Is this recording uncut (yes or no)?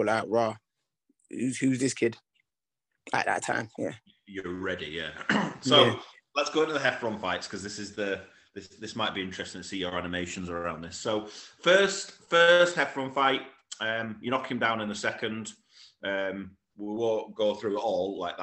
yes